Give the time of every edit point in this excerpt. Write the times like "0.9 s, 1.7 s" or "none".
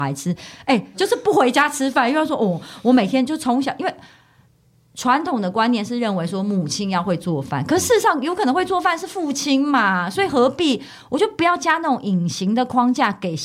0.9 s